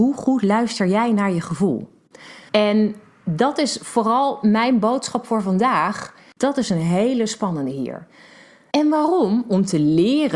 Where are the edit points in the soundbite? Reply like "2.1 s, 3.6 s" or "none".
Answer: 2.5 s, 6.3 s, 8.7 s